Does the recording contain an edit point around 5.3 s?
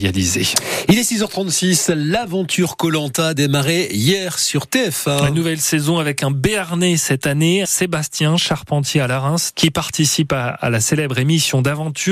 no; 2 cuts; at 7.6 s, 9.5 s

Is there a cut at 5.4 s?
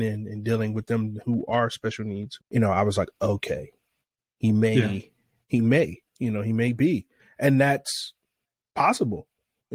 no; 1 cut; at 2.4 s

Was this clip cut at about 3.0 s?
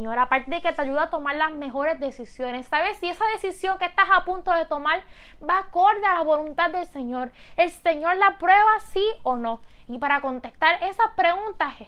no; 0 cuts

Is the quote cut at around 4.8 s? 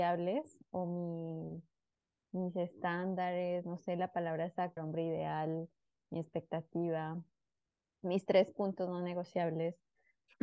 yes; 1 cut; at 4.8 s

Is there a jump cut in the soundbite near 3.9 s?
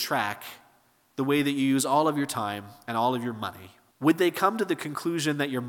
yes; 1 cut; at 3.9 s

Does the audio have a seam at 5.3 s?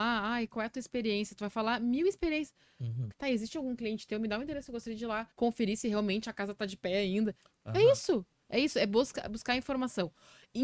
yes; 2 cuts; at 3.1 s, 5.3 s

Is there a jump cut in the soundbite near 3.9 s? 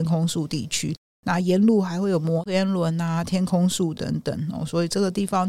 no; 0 cuts

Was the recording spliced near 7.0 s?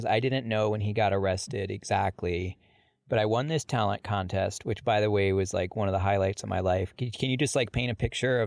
no; 0 cuts

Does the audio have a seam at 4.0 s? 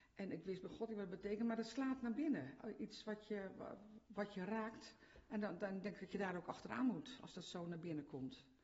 yes; 1 cut; at 4.0 s

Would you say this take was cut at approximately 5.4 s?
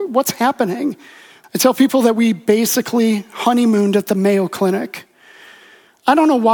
no; 1 cut; at 1.4 s

